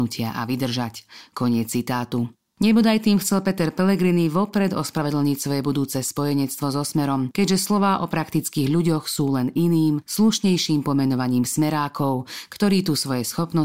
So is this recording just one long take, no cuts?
no; 1 cut; at 2.4 s

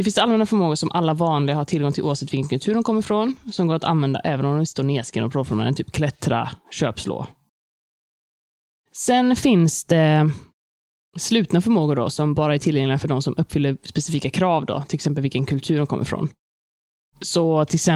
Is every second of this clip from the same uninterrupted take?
yes; 0 cuts

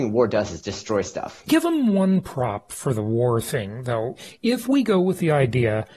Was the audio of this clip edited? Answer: no; 0 cuts

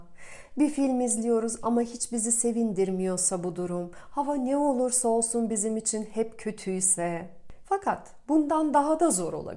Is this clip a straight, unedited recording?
no; 1 cut; at 7.6 s

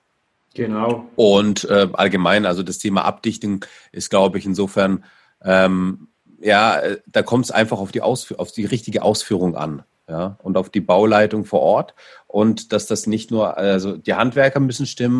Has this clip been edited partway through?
no; 0 cuts

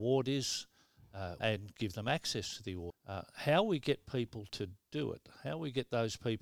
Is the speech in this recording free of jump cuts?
no; 2 cuts; at 1.4 s, 2.9 s

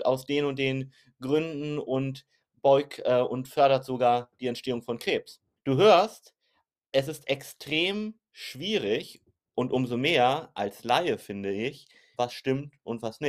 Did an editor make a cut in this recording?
yes; 2 cuts; at 5.6 s, 12.1 s

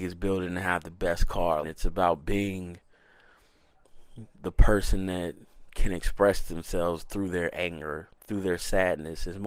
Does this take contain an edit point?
yes; 1 cut; at 1.6 s

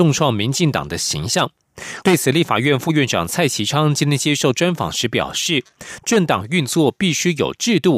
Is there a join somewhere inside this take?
yes; 1 cut; at 2.0 s

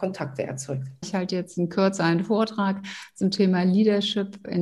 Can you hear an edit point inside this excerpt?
yes; 1 cut; at 1.0 s

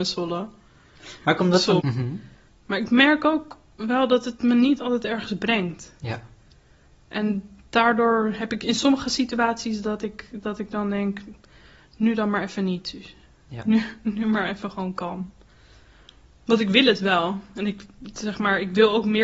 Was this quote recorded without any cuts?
no; 1 cut; at 1.8 s

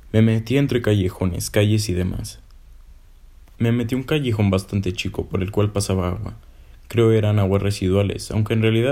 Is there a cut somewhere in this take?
yes; 1 cut; at 3.5 s

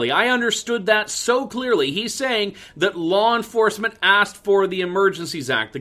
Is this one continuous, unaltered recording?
yes; 0 cuts

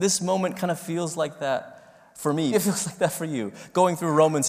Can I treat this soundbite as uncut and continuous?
no; 1 cut; at 2.5 s

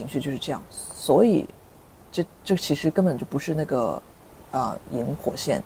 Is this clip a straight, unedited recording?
yes; 0 cuts

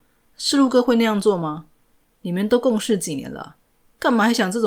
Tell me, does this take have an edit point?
no; 0 cuts

